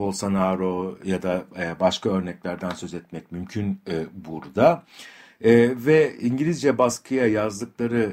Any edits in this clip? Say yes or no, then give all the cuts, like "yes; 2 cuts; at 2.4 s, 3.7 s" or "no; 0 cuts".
no; 0 cuts